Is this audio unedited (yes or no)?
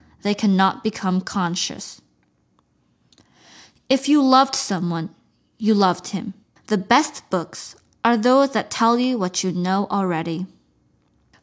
no